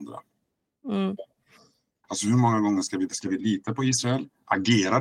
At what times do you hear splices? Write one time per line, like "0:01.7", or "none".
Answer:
0:02.0
0:03.1